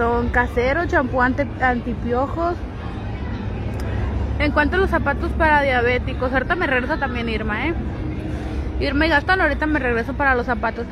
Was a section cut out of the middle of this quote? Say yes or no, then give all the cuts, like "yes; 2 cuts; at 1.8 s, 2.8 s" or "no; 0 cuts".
no; 0 cuts